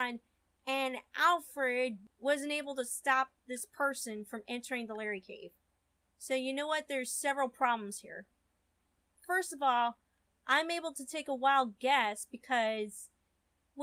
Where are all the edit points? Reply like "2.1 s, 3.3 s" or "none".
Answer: none